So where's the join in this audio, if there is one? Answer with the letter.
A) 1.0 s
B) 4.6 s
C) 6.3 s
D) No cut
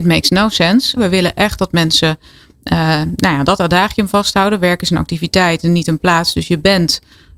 A